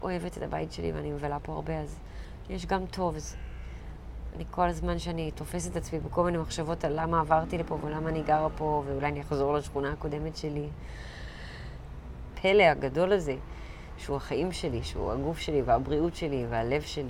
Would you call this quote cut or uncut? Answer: cut